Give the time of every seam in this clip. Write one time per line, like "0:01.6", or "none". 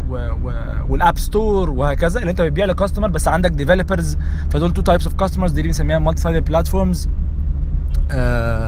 none